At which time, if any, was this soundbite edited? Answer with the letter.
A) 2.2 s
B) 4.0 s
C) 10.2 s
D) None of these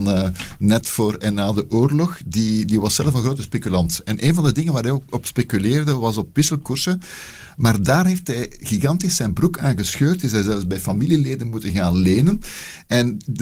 B